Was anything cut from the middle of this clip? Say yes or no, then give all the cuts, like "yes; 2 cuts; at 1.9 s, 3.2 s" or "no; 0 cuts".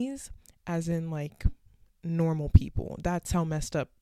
no; 0 cuts